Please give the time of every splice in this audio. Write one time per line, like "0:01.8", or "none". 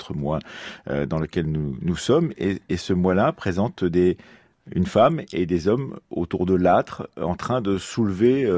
none